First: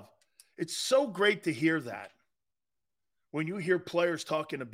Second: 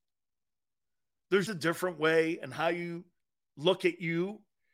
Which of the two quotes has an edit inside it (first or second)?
second